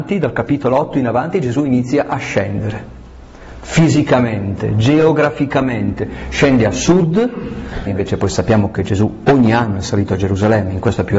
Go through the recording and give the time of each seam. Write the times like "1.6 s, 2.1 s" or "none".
7.9 s